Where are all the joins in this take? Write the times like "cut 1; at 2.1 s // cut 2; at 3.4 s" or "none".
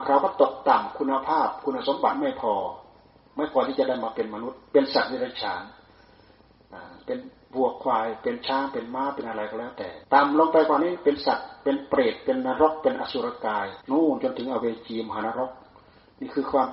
cut 1; at 10.0 s // cut 2; at 13.8 s